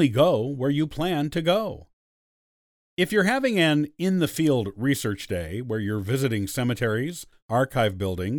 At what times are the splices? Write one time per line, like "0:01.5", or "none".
0:07.4